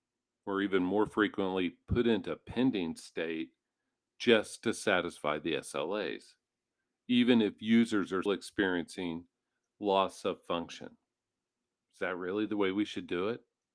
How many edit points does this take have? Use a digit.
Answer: 2